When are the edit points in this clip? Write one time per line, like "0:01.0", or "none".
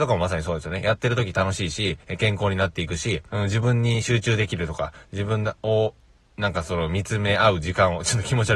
0:03.3